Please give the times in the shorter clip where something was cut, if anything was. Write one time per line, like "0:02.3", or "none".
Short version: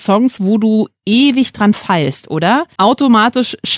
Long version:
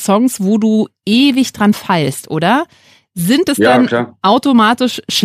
0:02.8